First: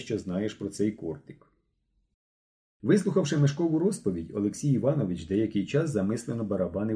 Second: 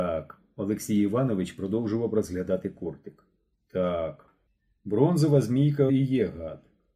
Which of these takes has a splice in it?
second; 1 cut; at 5.9 s

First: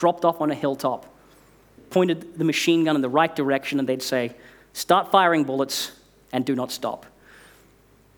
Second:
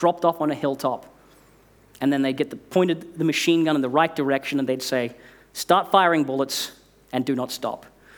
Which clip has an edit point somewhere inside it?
first; 1 cut; at 1.8 s

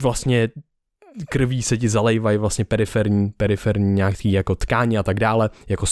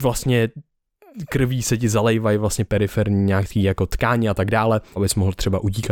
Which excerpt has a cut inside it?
second; 2 cuts; at 2.7 s, 5.0 s

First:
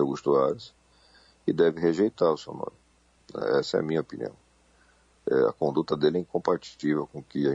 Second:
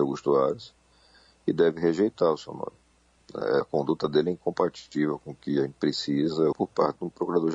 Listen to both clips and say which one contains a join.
second; 2 cuts; at 3.6 s, 6.5 s

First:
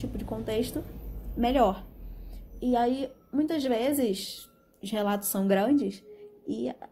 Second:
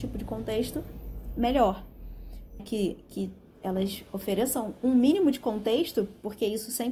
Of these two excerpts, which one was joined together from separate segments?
second; 1 cut; at 2.6 s

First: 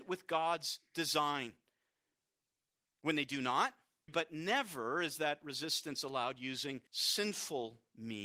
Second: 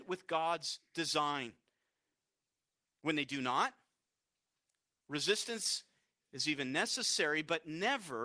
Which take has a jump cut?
first; 2 cuts; at 4.1 s, 6.9 s

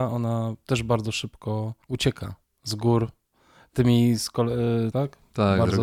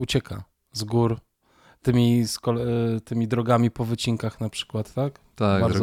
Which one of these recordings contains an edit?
first; 2 cuts; at 1.8 s, 4.9 s

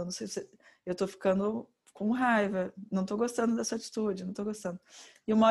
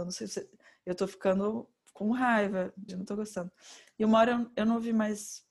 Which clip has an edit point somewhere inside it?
second; 1 cut; at 2.9 s

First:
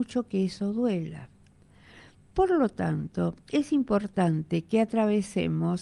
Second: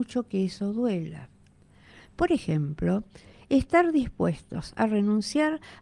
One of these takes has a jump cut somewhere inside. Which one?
second; 1 cut; at 2.0 s

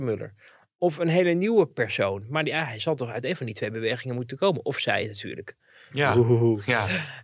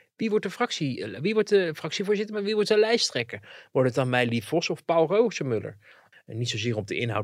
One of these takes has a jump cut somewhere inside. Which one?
second; 1 cut; at 6.1 s

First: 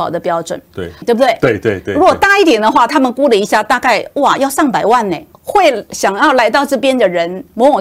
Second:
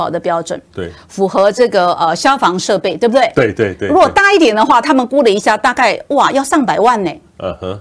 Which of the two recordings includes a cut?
first; 2 cuts; at 1.0 s, 5.3 s

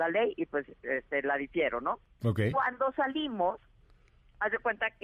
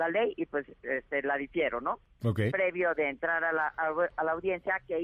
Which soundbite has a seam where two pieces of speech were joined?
second; 1 cut; at 2.5 s

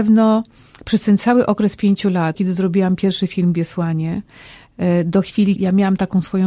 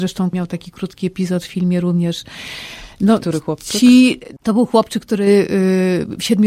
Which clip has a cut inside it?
first; 2 cuts; at 2.3 s, 5.6 s

